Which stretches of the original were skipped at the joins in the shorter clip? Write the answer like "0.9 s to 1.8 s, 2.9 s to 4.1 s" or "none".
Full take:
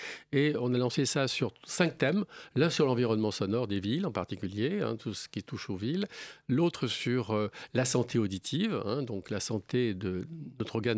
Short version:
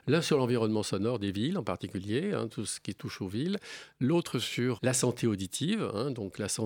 7.3 s to 7.7 s